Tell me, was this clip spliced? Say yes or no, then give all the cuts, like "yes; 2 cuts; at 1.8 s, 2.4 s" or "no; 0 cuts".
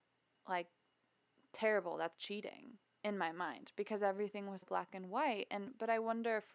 yes; 2 cuts; at 2.1 s, 4.6 s